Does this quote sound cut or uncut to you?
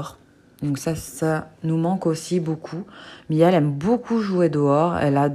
uncut